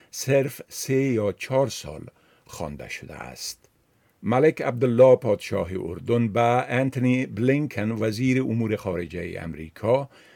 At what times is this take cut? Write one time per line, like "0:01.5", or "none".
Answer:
none